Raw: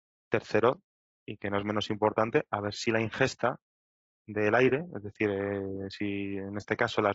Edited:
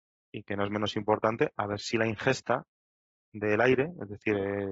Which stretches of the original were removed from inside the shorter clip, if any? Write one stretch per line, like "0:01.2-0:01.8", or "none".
none